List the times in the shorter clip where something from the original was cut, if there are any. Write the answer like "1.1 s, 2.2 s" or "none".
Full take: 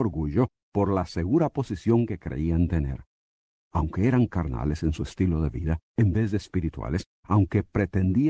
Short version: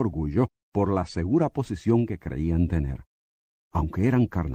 none